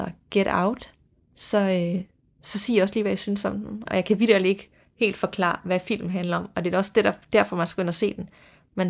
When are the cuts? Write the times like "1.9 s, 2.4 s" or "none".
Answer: 3.9 s